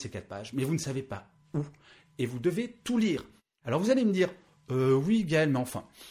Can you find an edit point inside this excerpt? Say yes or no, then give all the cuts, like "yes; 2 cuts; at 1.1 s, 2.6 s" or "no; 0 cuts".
yes; 1 cut; at 3.6 s